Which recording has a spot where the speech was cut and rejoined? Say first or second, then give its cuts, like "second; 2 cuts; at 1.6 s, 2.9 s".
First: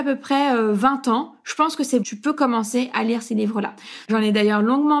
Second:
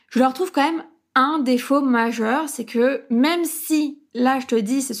first; 2 cuts; at 2.0 s, 4.0 s